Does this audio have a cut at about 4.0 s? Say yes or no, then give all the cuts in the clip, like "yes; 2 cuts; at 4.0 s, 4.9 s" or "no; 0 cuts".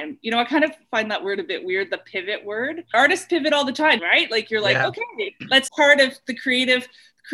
yes; 2 cuts; at 4.0 s, 5.7 s